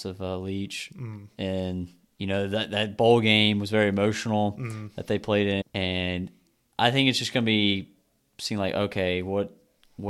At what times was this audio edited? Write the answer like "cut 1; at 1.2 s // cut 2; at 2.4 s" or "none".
cut 1; at 5.6 s